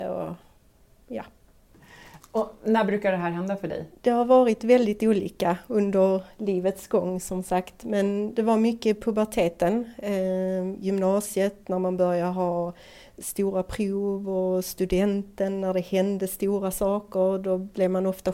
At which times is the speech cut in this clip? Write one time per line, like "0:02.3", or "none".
0:03.9